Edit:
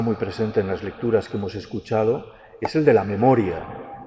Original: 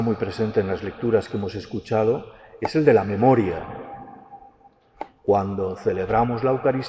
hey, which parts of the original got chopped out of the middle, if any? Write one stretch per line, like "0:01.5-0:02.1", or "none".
none